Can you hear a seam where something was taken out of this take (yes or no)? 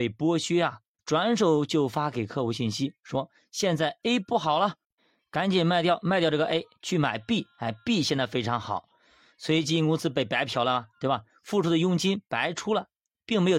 yes